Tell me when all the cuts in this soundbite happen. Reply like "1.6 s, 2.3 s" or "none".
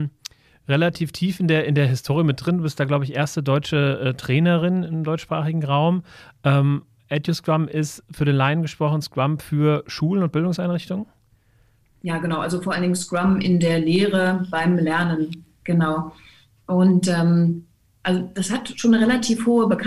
none